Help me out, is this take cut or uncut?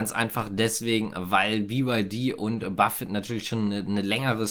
uncut